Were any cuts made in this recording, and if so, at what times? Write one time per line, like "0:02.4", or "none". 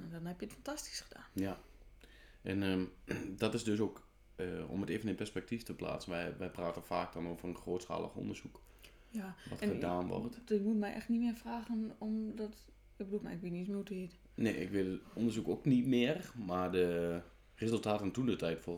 0:13.2